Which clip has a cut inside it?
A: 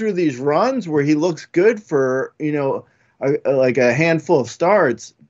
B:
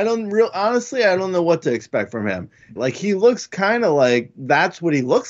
B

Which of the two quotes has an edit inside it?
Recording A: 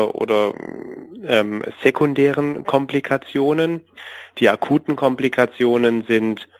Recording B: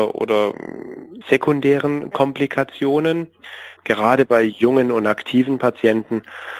B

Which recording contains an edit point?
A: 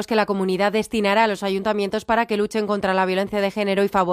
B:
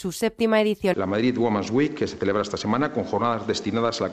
B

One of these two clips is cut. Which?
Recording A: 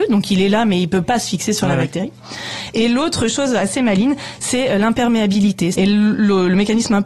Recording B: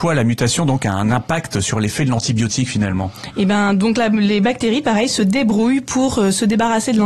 A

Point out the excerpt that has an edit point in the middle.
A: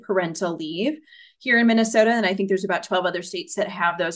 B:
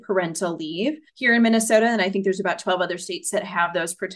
B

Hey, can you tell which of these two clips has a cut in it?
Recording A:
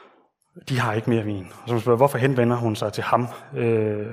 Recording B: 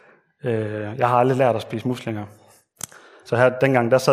B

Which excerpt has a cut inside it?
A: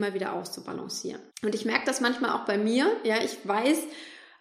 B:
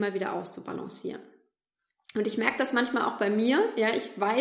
A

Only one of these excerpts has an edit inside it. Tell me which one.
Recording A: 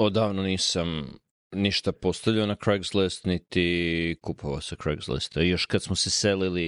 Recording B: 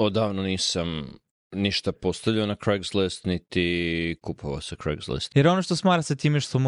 B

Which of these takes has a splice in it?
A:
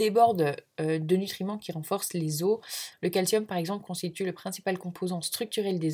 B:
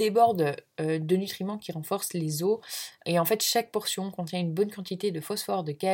A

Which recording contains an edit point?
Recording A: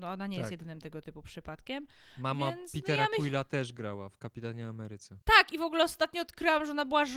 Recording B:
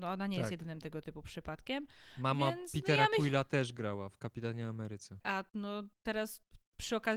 B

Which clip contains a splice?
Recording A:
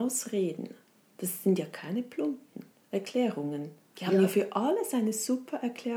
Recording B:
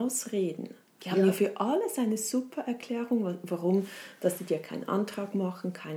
B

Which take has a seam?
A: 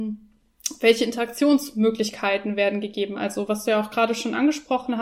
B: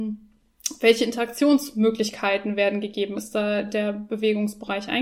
B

